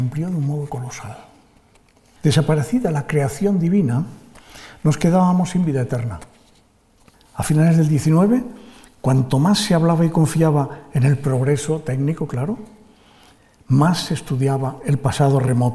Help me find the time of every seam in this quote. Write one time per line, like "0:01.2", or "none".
0:02.2
0:07.1